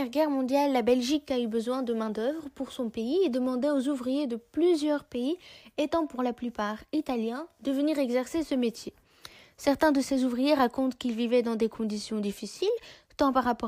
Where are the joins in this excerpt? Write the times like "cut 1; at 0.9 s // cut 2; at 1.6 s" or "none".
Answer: none